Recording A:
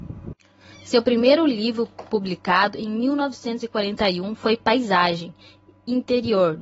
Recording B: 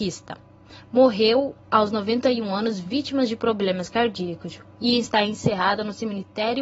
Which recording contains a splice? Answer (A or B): B